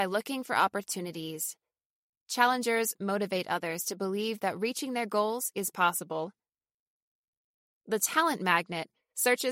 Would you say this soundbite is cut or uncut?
uncut